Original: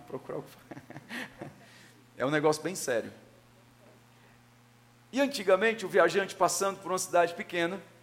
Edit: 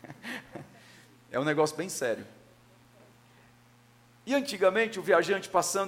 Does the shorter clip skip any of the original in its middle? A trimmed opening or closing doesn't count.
no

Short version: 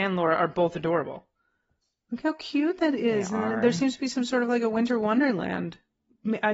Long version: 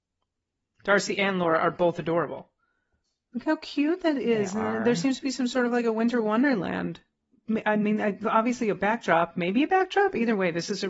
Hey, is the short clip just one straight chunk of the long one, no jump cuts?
yes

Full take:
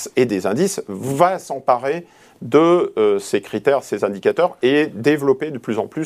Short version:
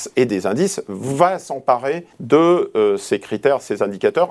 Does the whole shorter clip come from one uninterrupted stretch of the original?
no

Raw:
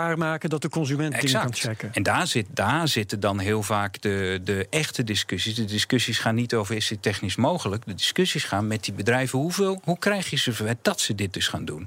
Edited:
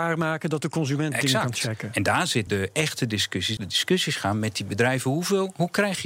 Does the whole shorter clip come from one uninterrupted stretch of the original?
no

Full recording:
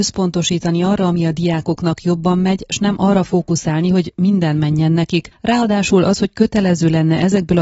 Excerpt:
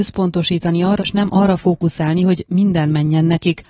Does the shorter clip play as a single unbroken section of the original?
no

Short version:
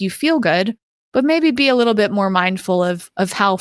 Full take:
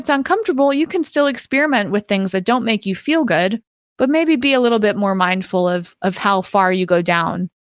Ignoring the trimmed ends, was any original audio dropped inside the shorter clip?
no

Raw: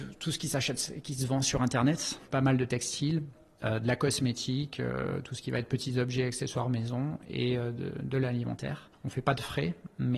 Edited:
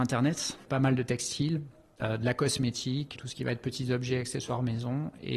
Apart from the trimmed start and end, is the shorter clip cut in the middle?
yes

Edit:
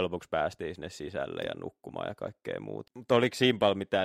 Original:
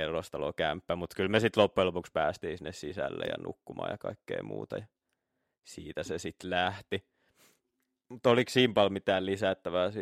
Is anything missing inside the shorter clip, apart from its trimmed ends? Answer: yes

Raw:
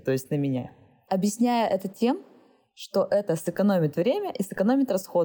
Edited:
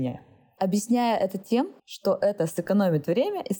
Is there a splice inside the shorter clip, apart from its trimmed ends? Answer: yes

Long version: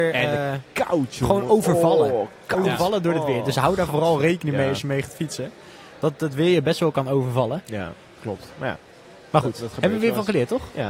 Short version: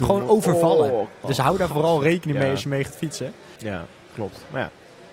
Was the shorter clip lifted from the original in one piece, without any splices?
no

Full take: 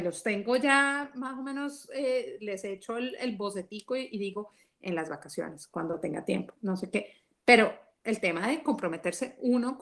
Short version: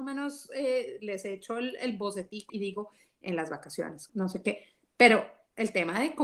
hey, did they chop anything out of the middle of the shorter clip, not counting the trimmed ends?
yes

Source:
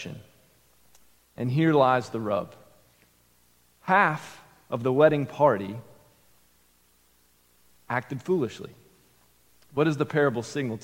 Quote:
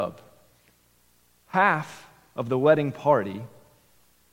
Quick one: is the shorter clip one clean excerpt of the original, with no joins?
yes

